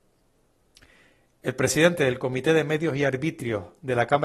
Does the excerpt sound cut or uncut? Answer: uncut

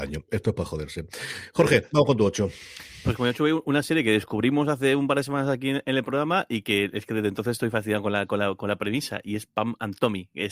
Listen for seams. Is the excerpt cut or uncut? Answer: uncut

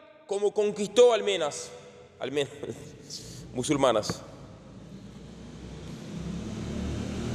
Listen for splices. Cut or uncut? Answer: uncut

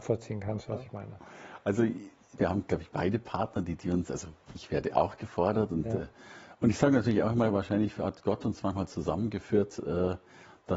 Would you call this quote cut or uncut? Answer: cut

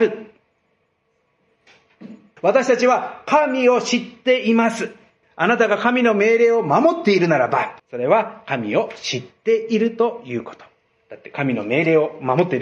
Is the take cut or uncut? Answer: cut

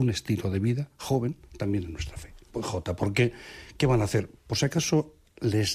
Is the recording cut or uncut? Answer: cut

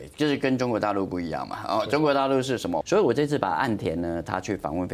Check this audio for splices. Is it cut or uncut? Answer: cut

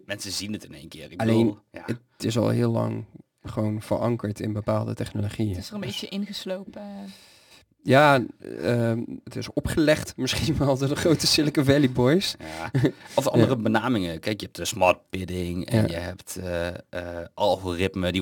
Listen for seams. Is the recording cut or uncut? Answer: cut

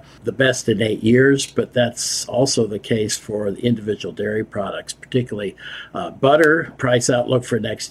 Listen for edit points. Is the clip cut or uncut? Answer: uncut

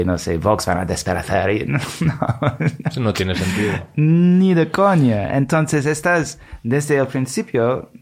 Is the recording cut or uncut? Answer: uncut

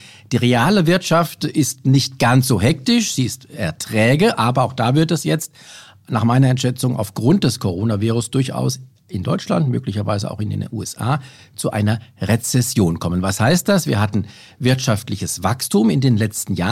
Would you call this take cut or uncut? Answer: uncut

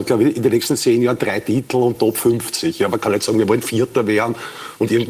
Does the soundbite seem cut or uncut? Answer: uncut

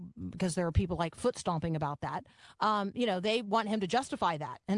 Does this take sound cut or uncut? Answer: uncut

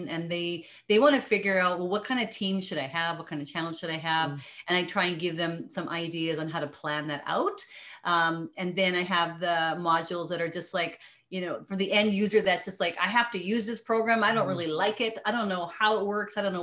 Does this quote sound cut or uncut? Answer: uncut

